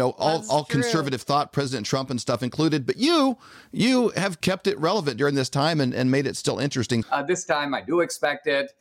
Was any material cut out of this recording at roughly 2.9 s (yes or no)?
no